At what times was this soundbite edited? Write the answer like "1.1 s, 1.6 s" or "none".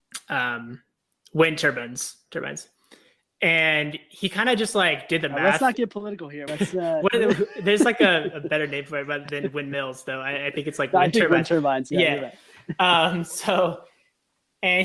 6.5 s